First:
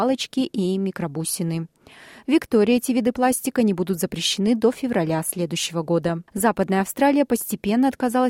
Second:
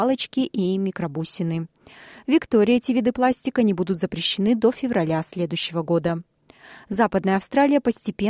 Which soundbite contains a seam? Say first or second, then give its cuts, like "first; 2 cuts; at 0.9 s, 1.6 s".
first; 1 cut; at 6.3 s